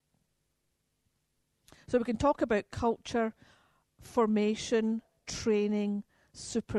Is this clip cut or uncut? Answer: uncut